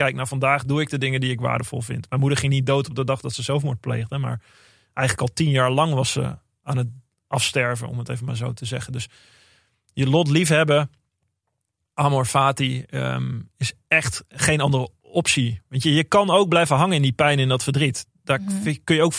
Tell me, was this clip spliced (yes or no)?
no